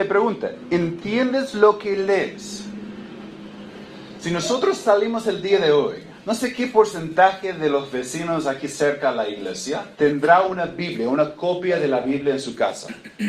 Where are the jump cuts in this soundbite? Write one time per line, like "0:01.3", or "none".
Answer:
0:06.2
0:09.9

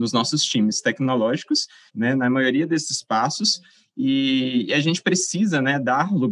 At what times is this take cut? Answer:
0:01.9

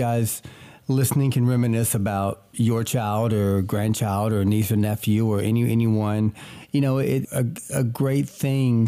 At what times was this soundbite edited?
0:07.2

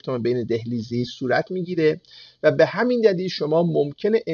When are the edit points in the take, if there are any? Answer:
none

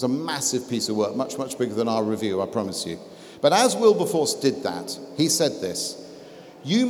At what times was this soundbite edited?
none

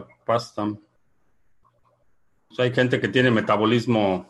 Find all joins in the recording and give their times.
0:01.0
0:02.5

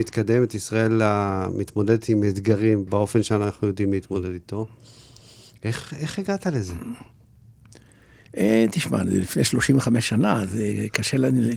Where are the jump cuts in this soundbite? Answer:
0:02.9

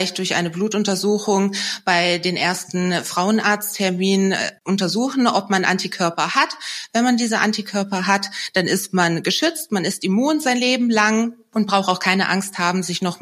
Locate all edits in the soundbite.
none

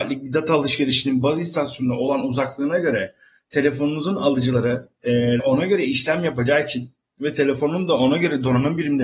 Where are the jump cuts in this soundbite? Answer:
0:05.4

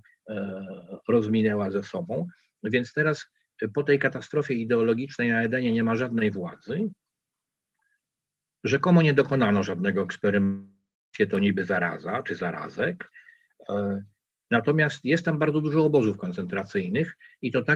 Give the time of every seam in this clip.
none

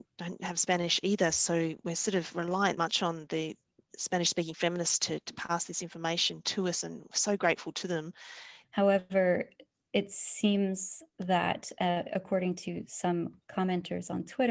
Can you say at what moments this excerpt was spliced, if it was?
0:02.8
0:08.6

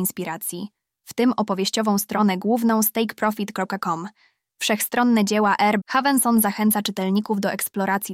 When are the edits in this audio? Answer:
0:05.8

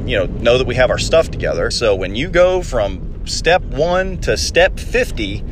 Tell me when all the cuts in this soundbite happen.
0:01.7

